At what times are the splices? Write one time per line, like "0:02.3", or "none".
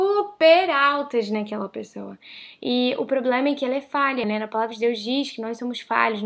0:04.2